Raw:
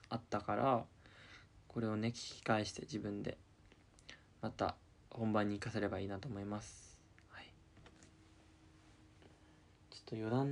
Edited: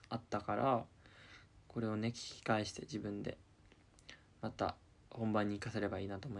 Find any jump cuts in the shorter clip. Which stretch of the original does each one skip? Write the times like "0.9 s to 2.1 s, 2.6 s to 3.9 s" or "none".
none